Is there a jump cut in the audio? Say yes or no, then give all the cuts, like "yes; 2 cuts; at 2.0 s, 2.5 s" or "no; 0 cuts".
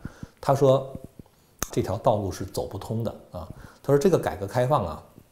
yes; 1 cut; at 1.7 s